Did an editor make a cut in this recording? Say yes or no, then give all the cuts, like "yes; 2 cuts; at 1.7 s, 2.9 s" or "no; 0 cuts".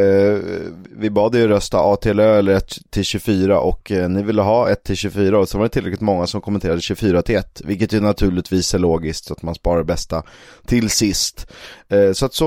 no; 0 cuts